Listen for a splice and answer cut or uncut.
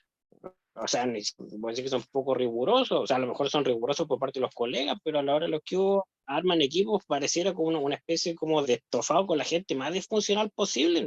cut